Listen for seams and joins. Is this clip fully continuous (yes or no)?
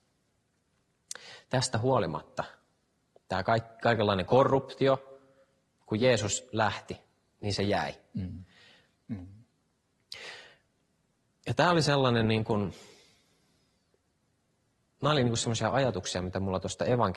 no